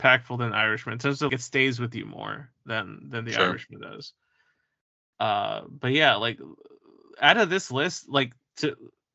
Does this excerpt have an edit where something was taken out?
yes; 1 cut; at 1.3 s

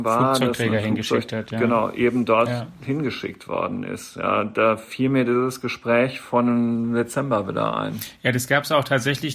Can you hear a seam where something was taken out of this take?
no; 0 cuts

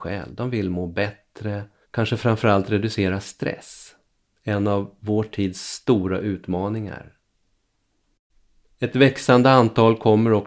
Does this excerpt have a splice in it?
yes; 1 cut; at 1.8 s

